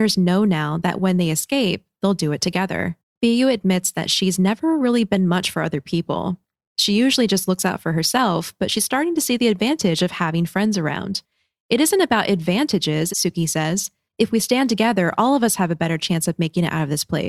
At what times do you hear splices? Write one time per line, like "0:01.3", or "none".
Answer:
0:13.1